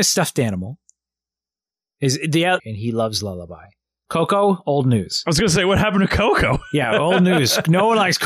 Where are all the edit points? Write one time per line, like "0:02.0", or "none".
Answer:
0:02.6